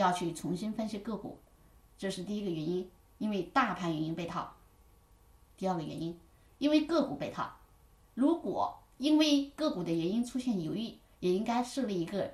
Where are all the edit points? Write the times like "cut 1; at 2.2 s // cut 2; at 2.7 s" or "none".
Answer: cut 1; at 8.1 s